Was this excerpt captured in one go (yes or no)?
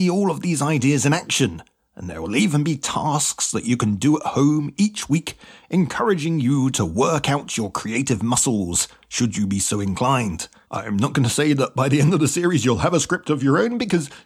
no